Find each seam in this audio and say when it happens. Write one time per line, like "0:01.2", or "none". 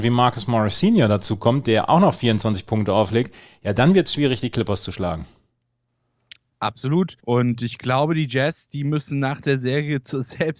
0:07.2